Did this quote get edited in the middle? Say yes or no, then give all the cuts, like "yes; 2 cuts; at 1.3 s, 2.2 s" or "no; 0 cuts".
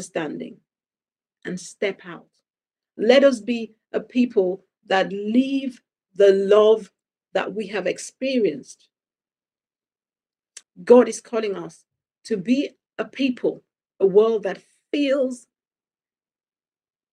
yes; 1 cut; at 10.6 s